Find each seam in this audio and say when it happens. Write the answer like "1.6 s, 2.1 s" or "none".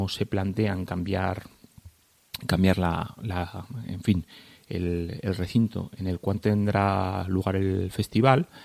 none